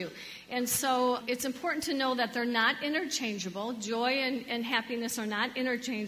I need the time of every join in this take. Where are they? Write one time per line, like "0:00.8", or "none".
0:01.2